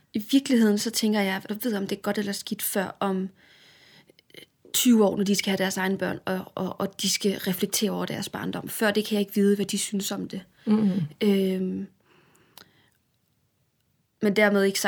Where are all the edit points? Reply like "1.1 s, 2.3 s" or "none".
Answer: 1.5 s